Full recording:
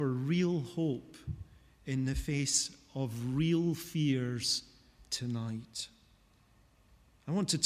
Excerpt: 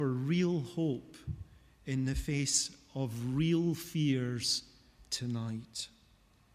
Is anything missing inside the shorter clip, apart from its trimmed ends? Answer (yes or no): no